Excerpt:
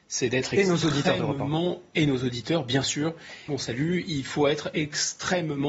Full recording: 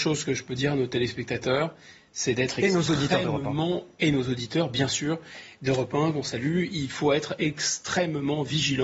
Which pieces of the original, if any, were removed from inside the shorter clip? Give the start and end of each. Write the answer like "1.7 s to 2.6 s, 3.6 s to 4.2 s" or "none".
5.5 s to 6.1 s